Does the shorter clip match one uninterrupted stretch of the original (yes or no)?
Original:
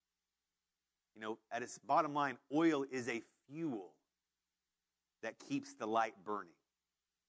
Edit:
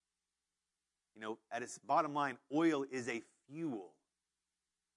yes